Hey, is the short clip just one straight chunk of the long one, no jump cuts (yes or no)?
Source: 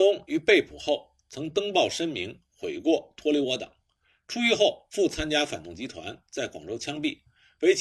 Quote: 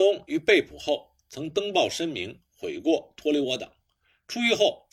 yes